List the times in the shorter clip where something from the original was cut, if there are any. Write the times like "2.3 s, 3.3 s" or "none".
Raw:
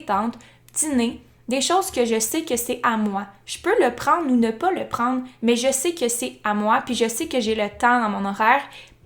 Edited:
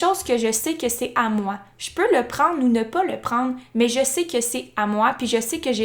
none

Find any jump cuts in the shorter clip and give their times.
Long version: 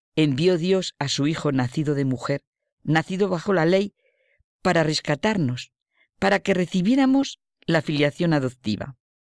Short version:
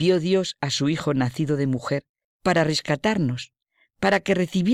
2.2 s

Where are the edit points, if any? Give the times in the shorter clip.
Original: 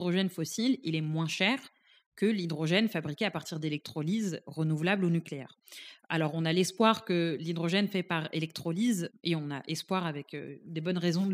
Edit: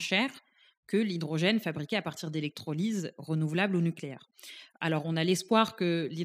none

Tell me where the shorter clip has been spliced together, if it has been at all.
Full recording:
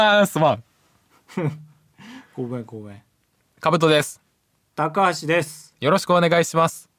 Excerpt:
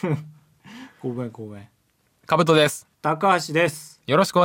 2.9 s

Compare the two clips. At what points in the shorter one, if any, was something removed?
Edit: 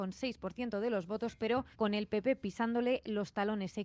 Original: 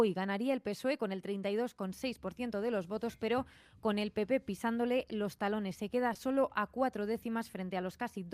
1.7 s

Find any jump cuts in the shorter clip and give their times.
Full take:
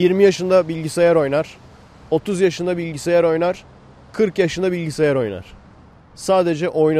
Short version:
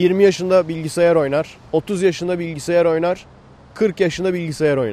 1.7 s

